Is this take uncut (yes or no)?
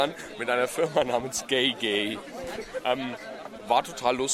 yes